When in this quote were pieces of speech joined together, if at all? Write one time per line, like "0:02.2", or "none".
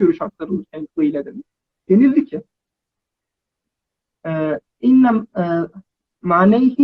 none

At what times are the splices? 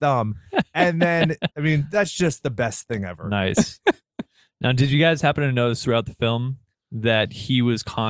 0:01.5

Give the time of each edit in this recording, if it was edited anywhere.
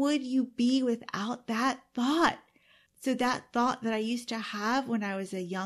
0:02.9

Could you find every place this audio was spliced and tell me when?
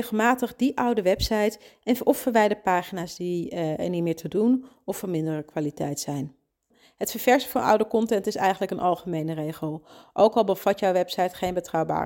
none

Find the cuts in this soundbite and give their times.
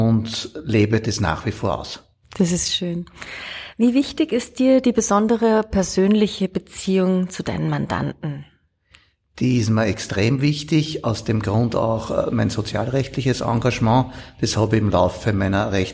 none

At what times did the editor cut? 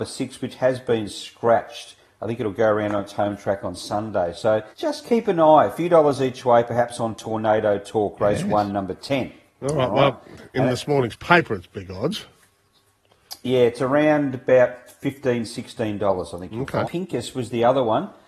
0:04.7
0:16.8

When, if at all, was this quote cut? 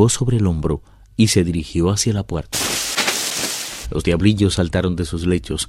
0:03.8

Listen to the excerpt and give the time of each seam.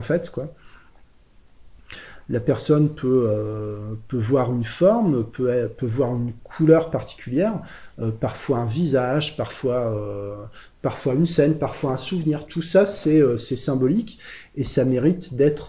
none

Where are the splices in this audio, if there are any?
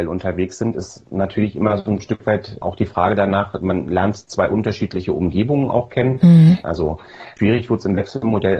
0:06.6

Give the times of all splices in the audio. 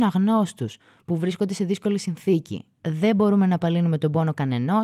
0:02.8

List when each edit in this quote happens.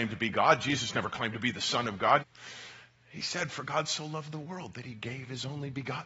0:02.2

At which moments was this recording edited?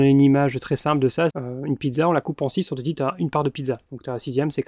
0:01.3

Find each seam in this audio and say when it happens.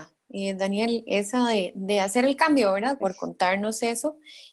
0:03.0

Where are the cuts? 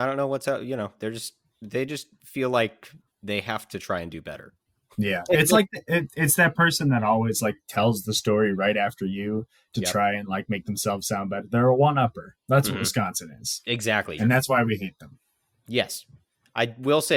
0:14.2

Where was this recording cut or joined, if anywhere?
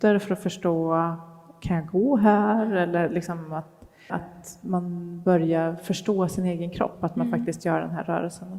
0:04.1

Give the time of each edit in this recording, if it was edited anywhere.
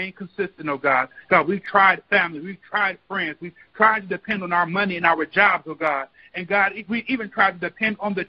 none

